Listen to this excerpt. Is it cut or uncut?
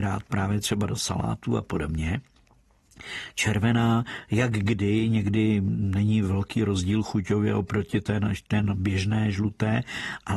uncut